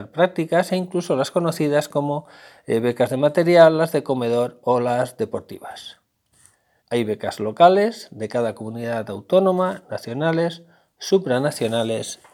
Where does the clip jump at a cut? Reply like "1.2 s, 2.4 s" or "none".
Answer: 6.8 s